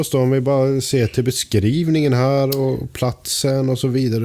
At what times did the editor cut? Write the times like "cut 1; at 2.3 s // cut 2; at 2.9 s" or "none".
none

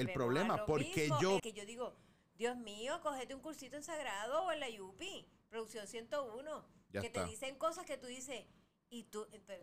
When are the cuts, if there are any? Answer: cut 1; at 1.4 s

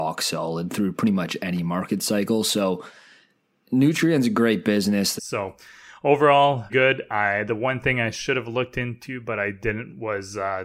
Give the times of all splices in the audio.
cut 1; at 5.2 s // cut 2; at 6.7 s

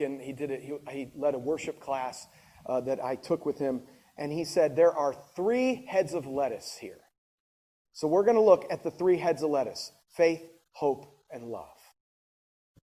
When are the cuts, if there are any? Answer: cut 1; at 7.9 s

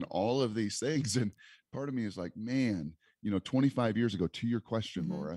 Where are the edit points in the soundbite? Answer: none

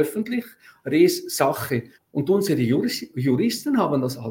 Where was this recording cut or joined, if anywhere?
cut 1; at 1.9 s

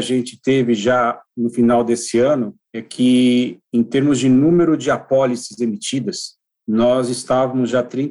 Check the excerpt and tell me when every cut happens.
none

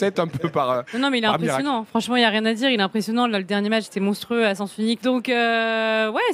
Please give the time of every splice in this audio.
cut 1; at 3.8 s // cut 2; at 5.0 s

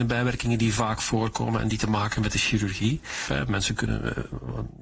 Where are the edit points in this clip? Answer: cut 1; at 3.3 s

